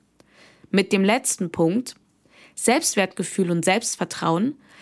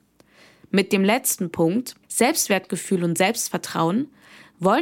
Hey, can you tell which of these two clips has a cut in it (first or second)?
second